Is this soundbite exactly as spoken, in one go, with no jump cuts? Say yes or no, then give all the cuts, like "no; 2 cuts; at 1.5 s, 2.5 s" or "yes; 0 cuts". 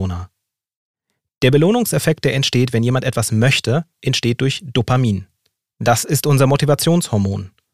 yes; 0 cuts